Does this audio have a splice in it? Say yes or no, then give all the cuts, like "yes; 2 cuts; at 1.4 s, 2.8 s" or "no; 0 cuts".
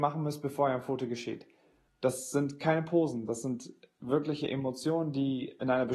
yes; 1 cut; at 1.9 s